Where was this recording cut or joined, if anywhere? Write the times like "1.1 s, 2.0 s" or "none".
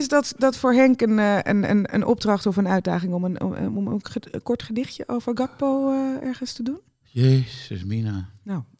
6.2 s